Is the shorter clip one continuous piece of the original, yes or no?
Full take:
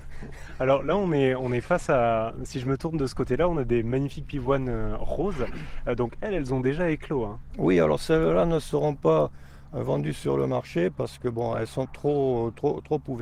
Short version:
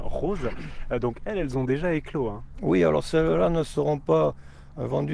yes